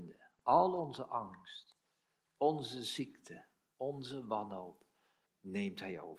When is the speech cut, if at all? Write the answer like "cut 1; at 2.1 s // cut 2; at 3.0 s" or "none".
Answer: cut 1; at 5.3 s